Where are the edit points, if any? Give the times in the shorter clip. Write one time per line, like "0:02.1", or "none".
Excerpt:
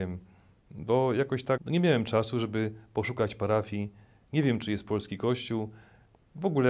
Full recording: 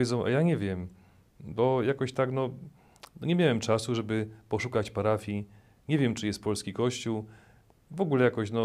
0:01.6